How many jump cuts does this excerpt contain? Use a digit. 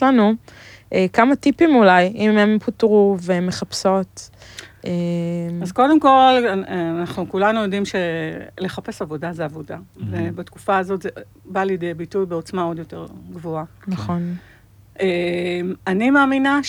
1